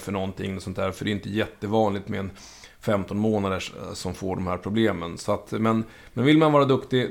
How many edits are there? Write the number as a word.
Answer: zero